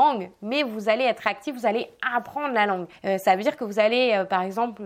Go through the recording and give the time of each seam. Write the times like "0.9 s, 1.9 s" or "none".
3.0 s